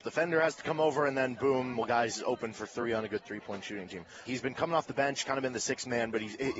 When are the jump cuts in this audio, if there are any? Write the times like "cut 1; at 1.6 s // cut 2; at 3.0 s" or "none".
cut 1; at 4.2 s